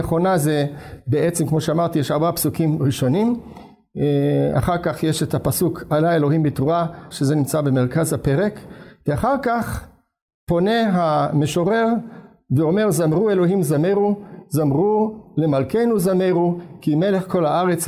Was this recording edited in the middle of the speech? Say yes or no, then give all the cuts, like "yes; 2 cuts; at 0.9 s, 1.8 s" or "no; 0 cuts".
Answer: yes; 1 cut; at 7.1 s